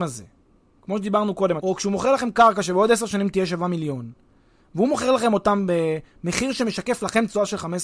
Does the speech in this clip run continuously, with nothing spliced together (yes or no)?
no